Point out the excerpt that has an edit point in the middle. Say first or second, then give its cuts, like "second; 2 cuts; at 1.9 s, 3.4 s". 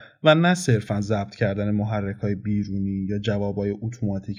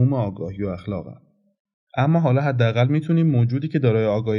second; 1 cut; at 1.9 s